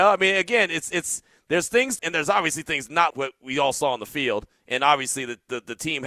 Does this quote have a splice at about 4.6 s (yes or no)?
no